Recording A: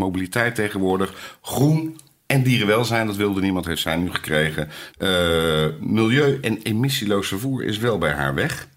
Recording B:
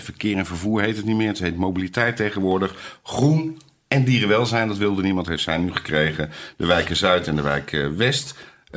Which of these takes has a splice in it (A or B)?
A